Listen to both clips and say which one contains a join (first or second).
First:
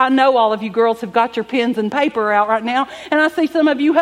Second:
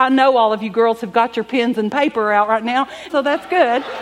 second